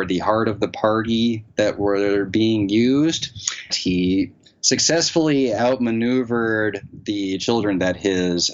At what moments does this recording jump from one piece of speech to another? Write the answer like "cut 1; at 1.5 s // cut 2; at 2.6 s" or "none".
cut 1; at 3.7 s